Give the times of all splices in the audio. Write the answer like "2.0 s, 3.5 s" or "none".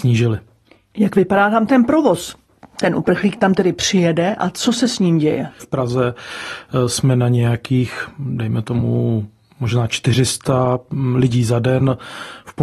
5.6 s